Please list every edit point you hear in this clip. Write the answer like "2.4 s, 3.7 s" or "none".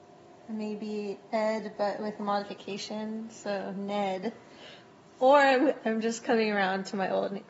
none